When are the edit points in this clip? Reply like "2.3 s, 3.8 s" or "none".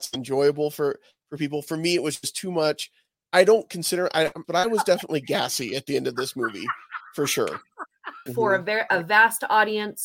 4.4 s, 8.3 s

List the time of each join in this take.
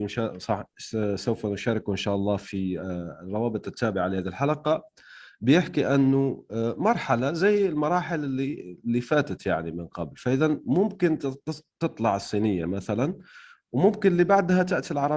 none

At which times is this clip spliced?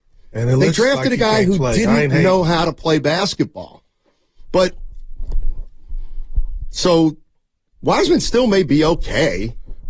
none

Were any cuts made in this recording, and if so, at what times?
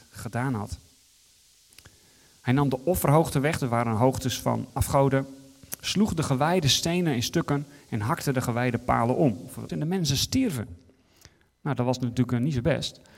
4.7 s, 9.7 s

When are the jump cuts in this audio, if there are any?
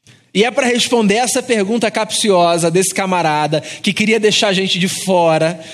none

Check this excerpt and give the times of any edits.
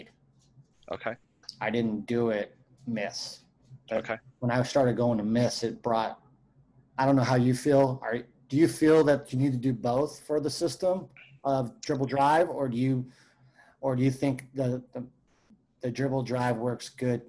none

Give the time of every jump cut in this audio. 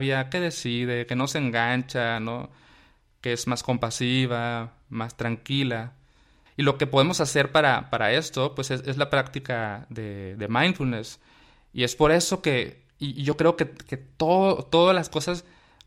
6.5 s

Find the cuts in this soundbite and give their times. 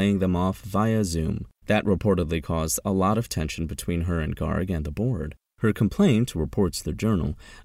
1.6 s, 5.5 s

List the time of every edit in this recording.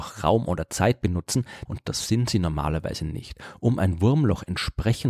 1.7 s

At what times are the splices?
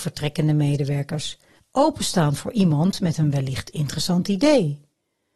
1.6 s

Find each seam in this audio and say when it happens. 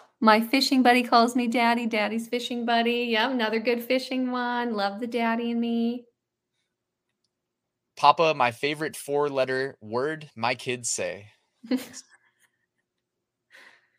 none

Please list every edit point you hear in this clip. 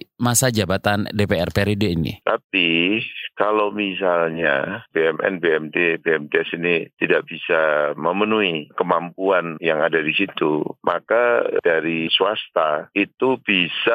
2.2 s

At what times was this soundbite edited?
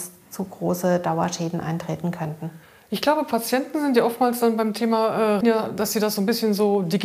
5.4 s

